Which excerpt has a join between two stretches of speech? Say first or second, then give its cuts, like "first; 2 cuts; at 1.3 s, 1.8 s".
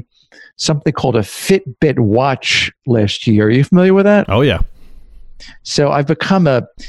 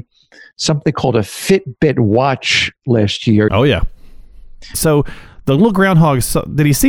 second; 2 cuts; at 3.5 s, 4.7 s